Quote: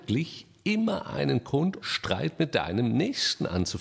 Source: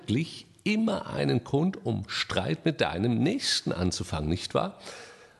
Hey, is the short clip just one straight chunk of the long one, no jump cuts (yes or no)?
no